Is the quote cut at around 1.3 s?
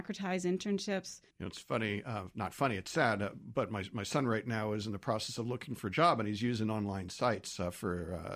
yes; 1 cut; at 1.3 s

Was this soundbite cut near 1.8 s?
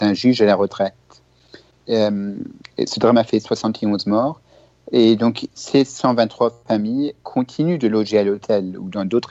yes; 1 cut; at 1.8 s

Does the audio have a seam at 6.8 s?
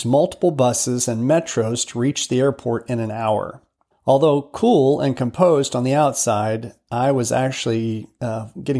no; 1 cut; at 3.9 s

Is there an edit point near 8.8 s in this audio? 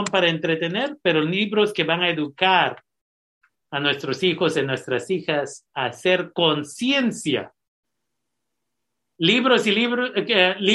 no; 0 cuts

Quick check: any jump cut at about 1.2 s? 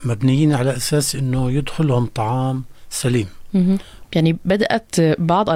no; 1 cut; at 4.0 s

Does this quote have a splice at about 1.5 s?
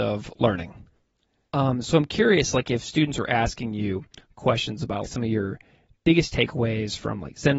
yes; 2 cuts; at 1.5 s, 5.0 s

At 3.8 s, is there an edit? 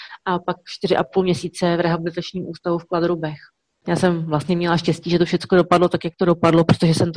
yes; 1 cut; at 3.8 s

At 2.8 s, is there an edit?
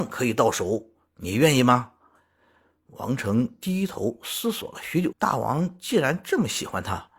no; 1 cut; at 5.1 s

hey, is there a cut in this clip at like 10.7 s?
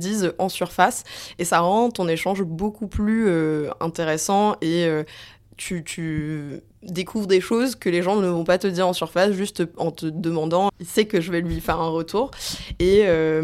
yes; 1 cut; at 10.7 s

